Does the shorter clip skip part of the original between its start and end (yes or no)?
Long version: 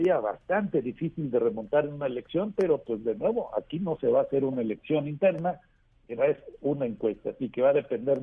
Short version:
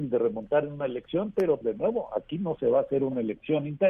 yes